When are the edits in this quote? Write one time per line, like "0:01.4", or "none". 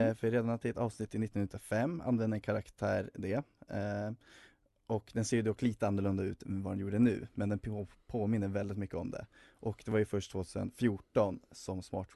none